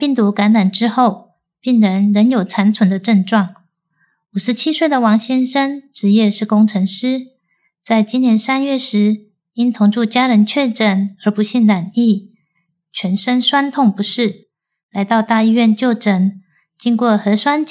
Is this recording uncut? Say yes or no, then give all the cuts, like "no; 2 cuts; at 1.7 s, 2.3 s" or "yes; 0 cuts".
no; 1 cut; at 12.8 s